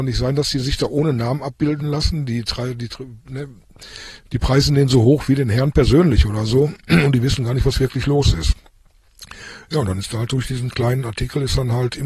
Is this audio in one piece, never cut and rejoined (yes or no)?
yes